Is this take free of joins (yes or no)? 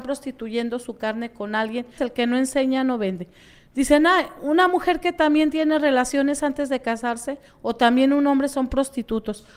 no